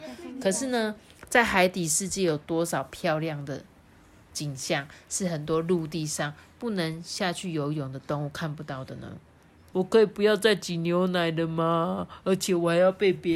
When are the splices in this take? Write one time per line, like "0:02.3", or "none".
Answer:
0:09.7